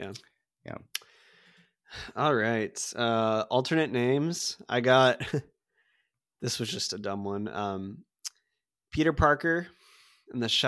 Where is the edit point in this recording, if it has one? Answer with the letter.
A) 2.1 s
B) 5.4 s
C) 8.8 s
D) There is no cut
D